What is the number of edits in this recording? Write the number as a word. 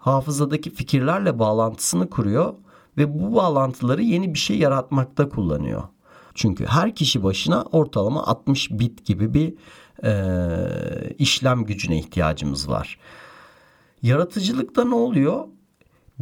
one